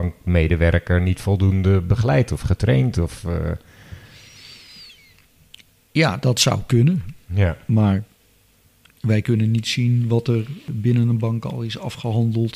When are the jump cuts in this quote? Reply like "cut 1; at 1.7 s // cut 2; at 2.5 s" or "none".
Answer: cut 1; at 7.2 s